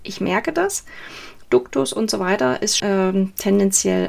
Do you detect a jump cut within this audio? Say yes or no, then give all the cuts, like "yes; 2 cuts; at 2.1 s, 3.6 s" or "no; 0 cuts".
yes; 1 cut; at 2.8 s